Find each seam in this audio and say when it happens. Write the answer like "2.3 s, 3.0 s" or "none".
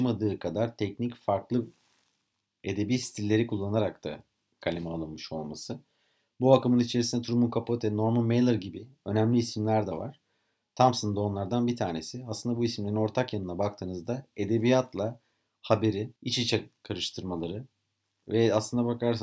16.2 s